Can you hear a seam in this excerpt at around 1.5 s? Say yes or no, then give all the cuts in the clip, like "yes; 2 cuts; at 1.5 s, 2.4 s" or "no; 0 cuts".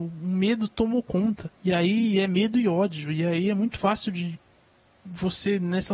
yes; 1 cut; at 1.5 s